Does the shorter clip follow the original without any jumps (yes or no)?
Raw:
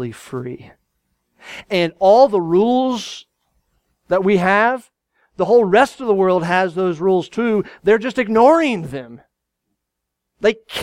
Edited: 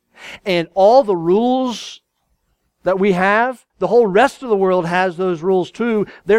no